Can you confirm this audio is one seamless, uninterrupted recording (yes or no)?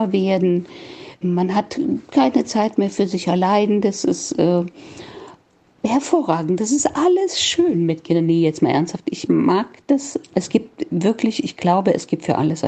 yes